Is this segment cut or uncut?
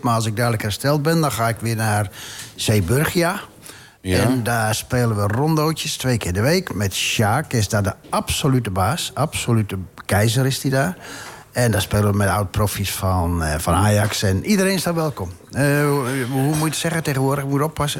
uncut